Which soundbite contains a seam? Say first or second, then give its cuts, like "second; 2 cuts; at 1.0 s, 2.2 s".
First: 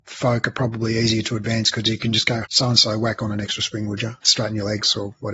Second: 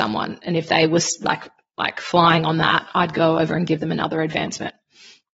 first; 2 cuts; at 2.4 s, 4.2 s